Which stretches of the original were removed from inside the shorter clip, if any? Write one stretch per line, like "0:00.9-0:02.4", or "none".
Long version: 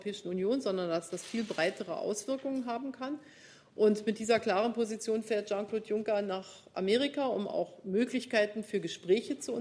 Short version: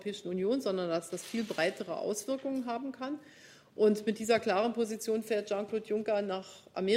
none